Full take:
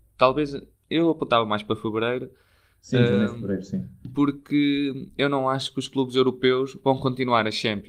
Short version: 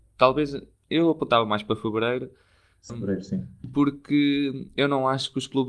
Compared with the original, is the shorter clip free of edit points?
no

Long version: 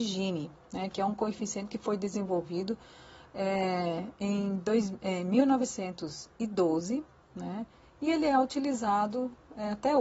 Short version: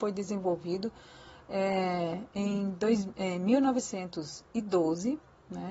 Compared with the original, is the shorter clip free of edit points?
yes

